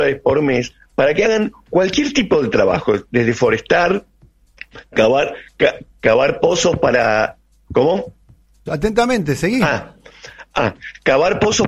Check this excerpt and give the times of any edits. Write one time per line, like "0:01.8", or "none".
0:08.7

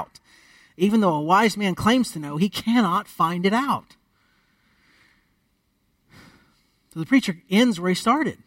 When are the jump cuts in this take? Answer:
none

